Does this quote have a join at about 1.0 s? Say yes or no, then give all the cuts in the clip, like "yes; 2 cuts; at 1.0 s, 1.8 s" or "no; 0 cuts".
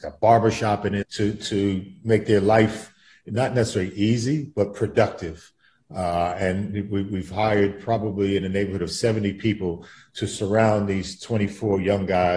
yes; 1 cut; at 1.0 s